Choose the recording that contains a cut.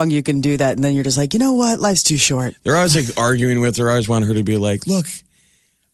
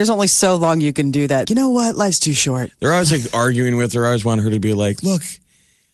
second; 1 cut; at 1.5 s

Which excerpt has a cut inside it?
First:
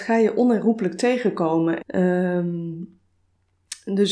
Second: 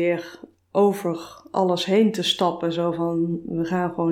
first; 1 cut; at 1.8 s

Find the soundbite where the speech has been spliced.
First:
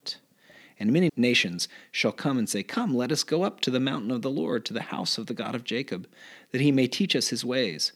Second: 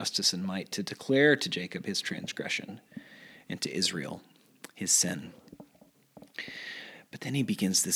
first; 1 cut; at 1.1 s

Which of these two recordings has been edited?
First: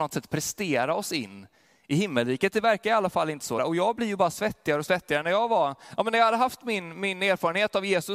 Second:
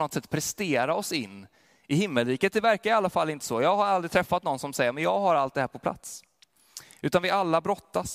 first; 1 cut; at 3.6 s

